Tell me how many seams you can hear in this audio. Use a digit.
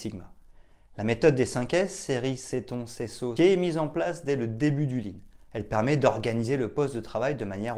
1